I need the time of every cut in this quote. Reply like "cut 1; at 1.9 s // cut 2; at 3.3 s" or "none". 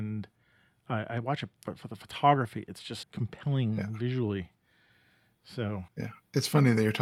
cut 1; at 3.0 s // cut 2; at 5.9 s